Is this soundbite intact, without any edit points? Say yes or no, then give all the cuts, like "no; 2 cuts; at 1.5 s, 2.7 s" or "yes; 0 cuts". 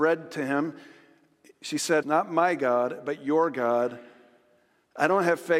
no; 1 cut; at 2.0 s